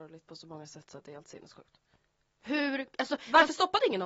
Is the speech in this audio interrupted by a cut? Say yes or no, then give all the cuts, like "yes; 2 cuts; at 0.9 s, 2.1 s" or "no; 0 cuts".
yes; 1 cut; at 2.2 s